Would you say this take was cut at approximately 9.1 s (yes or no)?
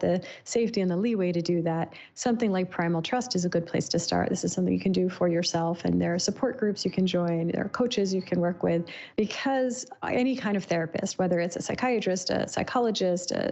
yes